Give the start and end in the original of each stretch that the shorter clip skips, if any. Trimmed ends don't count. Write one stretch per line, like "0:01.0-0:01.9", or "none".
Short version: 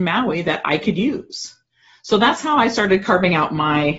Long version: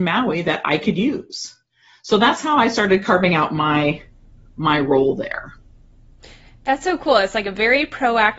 none